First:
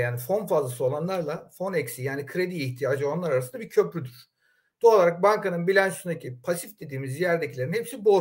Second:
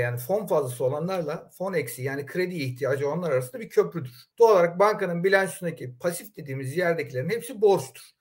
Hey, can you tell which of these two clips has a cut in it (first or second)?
second